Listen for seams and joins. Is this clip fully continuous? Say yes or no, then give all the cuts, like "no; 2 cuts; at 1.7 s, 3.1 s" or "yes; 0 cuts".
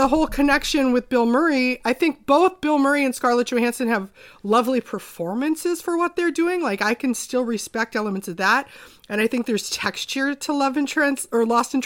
yes; 0 cuts